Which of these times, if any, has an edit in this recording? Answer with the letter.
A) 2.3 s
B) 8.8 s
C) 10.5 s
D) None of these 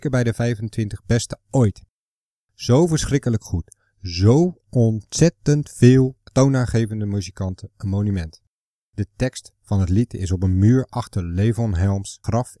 B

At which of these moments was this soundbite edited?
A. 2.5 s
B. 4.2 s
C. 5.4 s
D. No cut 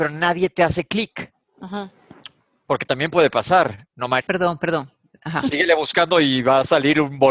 B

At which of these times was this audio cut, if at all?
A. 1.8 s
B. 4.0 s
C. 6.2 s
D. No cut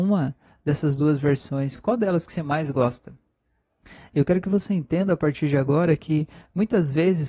D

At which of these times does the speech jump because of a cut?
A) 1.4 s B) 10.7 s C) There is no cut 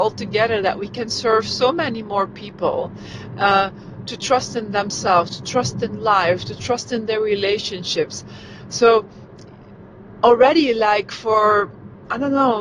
C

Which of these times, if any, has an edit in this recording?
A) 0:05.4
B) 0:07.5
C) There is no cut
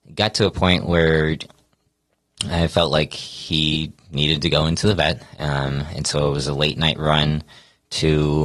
C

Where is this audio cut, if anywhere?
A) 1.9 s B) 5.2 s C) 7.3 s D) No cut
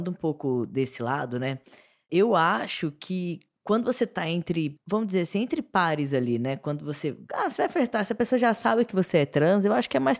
D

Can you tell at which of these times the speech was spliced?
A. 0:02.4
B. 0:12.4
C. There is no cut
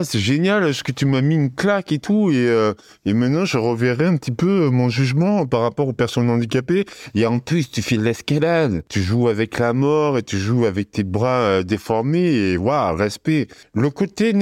C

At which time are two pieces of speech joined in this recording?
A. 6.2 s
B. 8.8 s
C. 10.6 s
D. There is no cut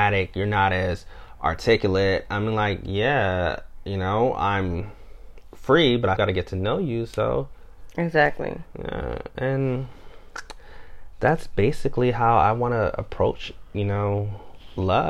A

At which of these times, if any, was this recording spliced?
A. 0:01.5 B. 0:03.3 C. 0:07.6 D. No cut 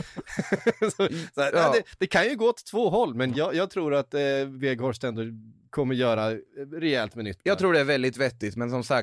B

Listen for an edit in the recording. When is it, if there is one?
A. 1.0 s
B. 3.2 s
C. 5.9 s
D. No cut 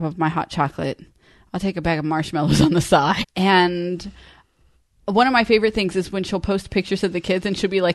B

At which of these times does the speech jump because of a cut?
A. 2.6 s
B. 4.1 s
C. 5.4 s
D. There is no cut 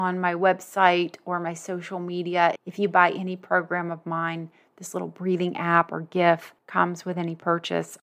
A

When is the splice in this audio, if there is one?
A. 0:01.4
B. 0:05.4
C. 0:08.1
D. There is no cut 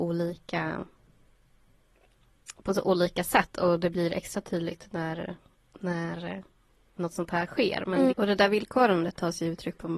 C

